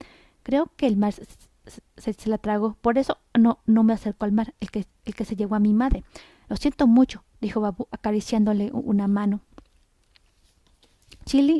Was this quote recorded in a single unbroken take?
yes; 0 cuts

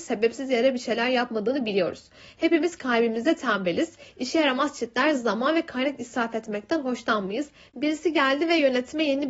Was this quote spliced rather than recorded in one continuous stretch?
yes; 1 cut; at 7.7 s

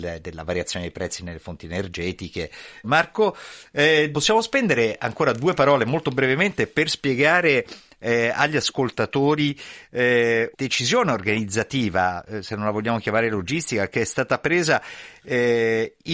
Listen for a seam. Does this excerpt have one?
yes; 3 cuts; at 2.8 s, 4.1 s, 10.5 s

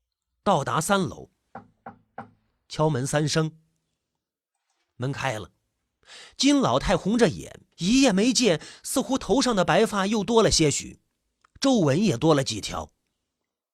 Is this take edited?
yes; 1 cut; at 7.7 s

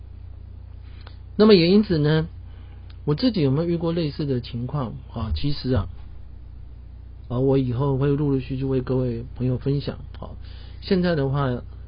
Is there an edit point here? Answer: yes; 1 cut; at 7.3 s

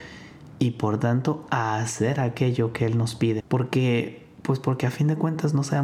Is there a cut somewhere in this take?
yes; 1 cut; at 3.4 s

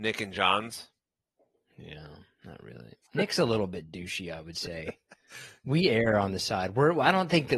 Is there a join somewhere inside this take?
no; 0 cuts

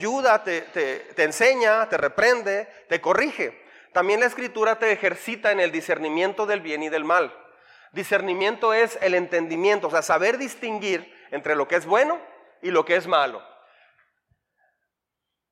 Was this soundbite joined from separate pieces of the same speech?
no; 0 cuts

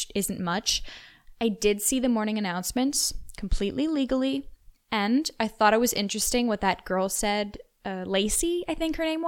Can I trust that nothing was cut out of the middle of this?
yes; 0 cuts

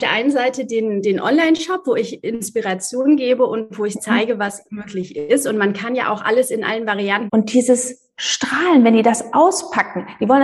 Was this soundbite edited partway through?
yes; 1 cut; at 7.3 s

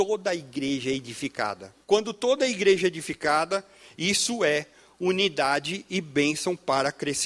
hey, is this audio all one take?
no; 1 cut; at 1.8 s

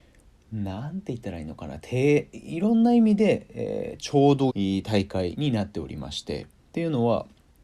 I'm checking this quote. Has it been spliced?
yes; 1 cut; at 4.5 s

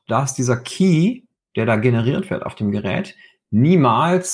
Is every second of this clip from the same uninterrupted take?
yes; 0 cuts

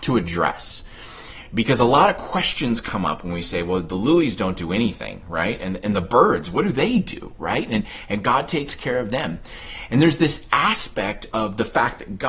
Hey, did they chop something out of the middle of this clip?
no; 0 cuts

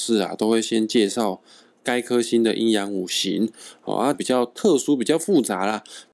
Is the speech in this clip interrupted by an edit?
yes; 1 cut; at 4.1 s

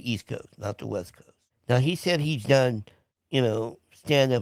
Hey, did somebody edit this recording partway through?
no; 0 cuts

